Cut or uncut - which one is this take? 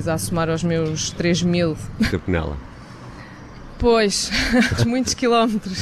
cut